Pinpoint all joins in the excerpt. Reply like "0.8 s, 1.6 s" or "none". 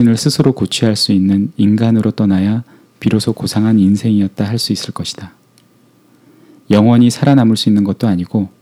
none